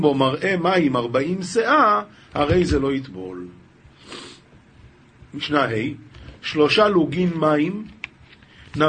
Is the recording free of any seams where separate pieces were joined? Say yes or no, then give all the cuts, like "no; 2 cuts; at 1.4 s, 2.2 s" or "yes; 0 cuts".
yes; 0 cuts